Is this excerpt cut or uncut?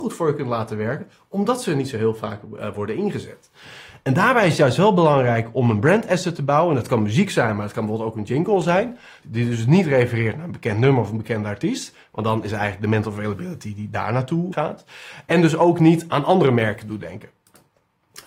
cut